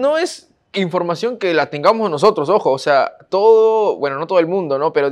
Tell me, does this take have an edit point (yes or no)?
no